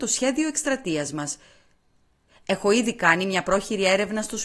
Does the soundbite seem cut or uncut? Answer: uncut